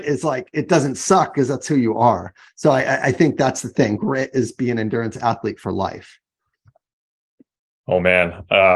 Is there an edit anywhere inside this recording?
yes; 1 cut; at 4.0 s

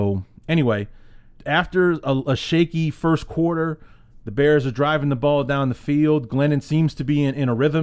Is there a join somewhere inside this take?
yes; 1 cut; at 1.4 s

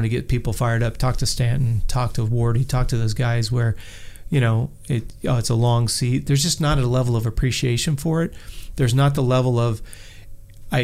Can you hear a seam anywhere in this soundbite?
no; 0 cuts

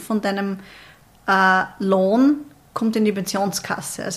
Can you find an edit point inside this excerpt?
no; 0 cuts

